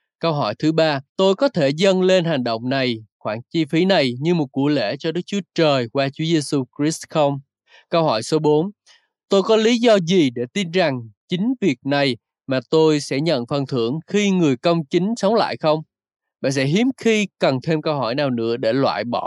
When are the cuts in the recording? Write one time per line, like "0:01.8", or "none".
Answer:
0:01.1